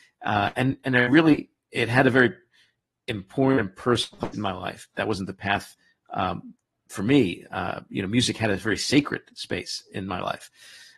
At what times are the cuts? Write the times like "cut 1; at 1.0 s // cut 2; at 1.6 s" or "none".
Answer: cut 1; at 5.0 s